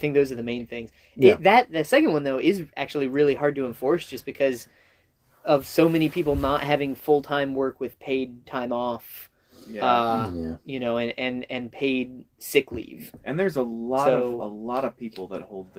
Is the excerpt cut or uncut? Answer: uncut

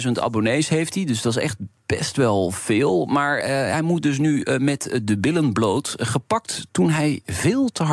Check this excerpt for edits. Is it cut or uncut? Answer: cut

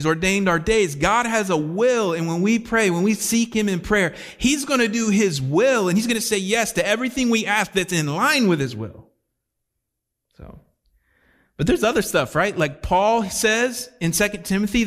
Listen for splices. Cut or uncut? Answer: uncut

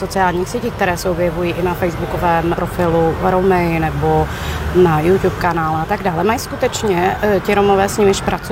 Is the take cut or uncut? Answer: cut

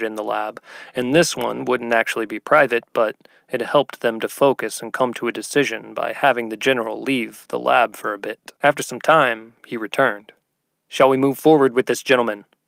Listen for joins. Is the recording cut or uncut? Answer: cut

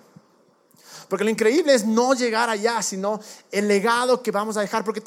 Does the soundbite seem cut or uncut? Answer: uncut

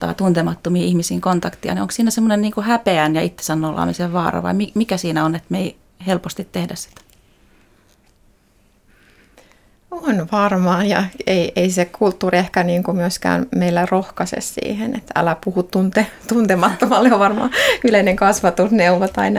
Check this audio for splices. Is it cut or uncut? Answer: uncut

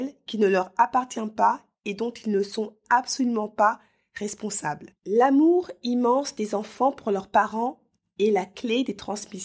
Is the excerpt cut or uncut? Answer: cut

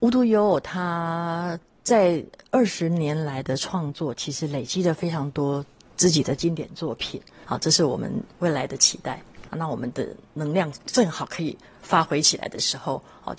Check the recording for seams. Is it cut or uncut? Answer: cut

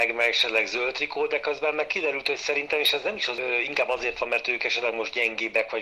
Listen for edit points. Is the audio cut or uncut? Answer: uncut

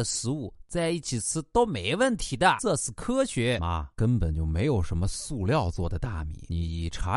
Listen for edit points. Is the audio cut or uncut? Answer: uncut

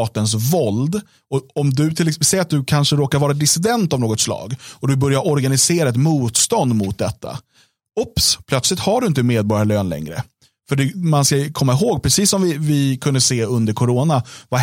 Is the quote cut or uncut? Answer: uncut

